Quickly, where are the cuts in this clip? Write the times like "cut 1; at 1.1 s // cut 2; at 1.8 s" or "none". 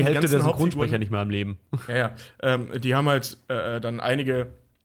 none